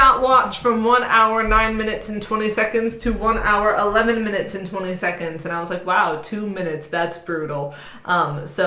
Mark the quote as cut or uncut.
uncut